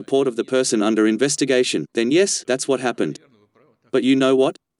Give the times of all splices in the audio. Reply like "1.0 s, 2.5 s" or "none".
2.4 s